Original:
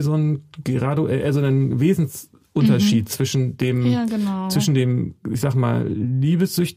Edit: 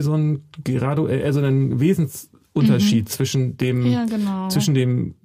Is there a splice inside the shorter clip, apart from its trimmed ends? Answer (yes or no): no